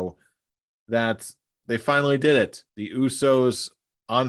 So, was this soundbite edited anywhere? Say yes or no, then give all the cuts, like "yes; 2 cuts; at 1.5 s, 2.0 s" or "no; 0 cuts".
yes; 1 cut; at 2.7 s